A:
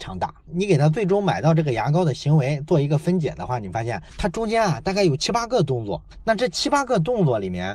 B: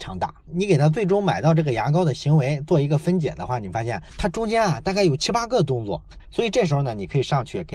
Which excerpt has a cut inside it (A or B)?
B